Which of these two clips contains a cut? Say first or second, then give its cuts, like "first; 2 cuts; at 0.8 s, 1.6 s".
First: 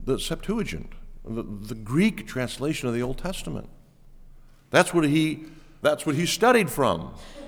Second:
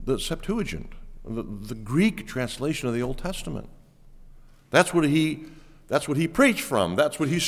first; 1 cut; at 5.8 s